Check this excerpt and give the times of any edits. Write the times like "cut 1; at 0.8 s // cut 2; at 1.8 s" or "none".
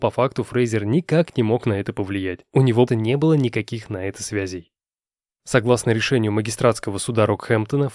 cut 1; at 2.9 s // cut 2; at 5.4 s

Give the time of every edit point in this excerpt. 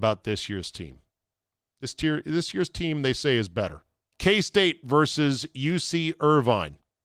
cut 1; at 4.1 s

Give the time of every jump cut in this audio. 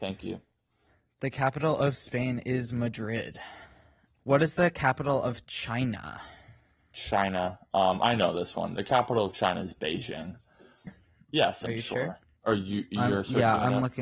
cut 1; at 4.2 s // cut 2; at 10.9 s // cut 3; at 12.4 s

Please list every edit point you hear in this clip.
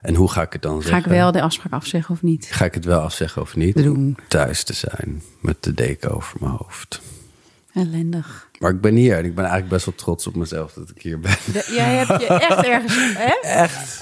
cut 1; at 3.8 s

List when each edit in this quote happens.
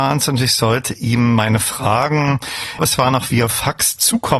cut 1; at 2.8 s

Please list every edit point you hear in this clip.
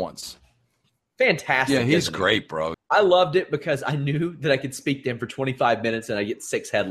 cut 1; at 2.7 s

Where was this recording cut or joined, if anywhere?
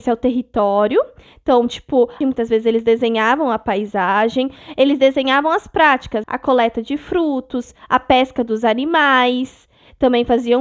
cut 1; at 2.2 s // cut 2; at 6.2 s

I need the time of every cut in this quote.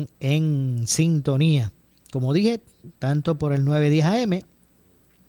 none

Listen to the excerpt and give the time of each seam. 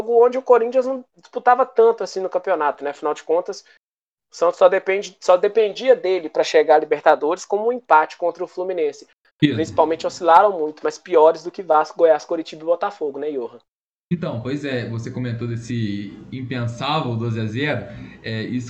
cut 1; at 9.3 s

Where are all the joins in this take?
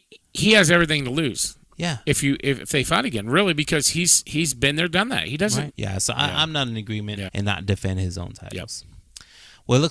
cut 1; at 5.7 s // cut 2; at 7.3 s

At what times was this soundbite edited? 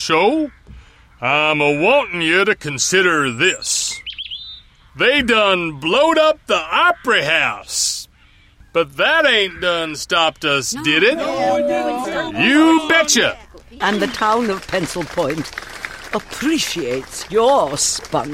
cut 1; at 12.0 s // cut 2; at 13.8 s

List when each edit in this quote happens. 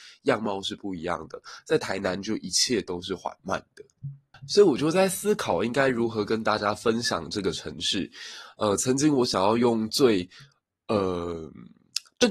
none

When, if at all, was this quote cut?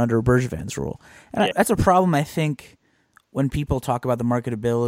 cut 1; at 1.5 s

